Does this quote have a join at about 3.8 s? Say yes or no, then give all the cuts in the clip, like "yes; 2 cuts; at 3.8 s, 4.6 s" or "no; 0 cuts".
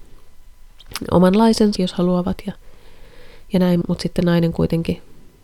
yes; 2 cuts; at 1.8 s, 3.8 s